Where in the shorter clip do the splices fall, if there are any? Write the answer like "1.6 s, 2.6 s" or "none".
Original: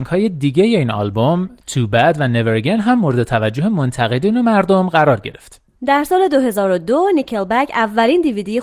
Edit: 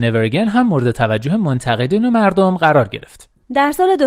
none